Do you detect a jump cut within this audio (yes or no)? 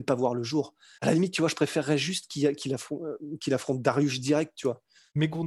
yes